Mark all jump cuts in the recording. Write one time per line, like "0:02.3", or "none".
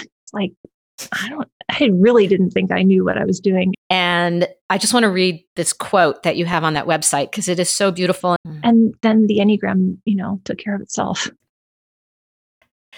0:03.7
0:08.4